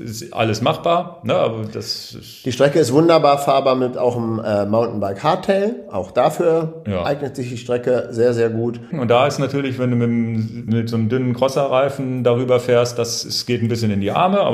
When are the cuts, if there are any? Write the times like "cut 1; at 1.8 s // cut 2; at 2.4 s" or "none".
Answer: cut 1; at 8.9 s // cut 2; at 10.7 s